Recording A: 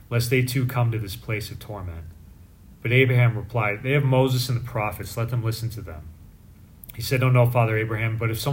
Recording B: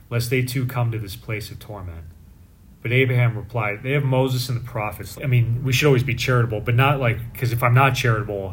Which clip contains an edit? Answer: B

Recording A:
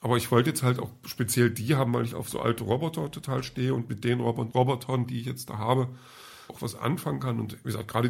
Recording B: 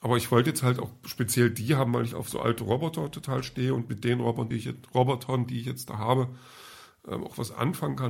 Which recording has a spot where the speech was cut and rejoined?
A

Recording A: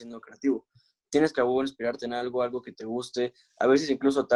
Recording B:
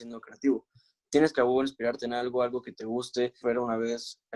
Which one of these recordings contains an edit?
B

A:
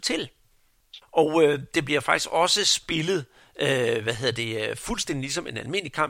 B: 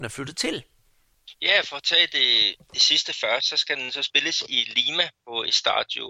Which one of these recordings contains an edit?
A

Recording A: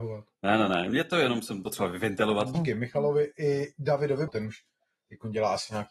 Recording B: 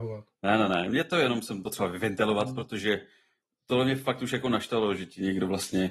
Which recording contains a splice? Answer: A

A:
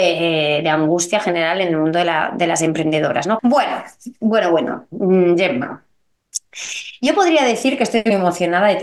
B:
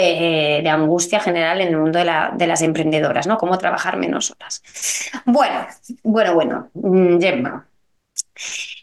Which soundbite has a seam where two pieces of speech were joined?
A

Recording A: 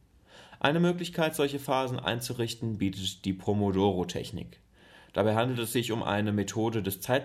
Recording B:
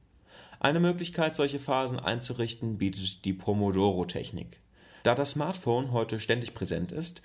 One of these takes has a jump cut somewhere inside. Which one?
B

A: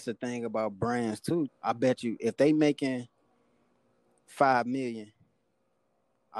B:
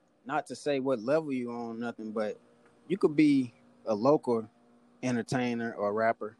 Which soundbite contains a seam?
A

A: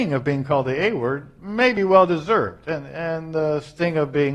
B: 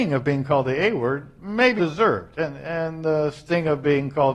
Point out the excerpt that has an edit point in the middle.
B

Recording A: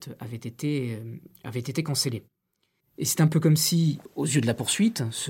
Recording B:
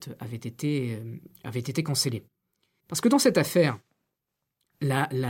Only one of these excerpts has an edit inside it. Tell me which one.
B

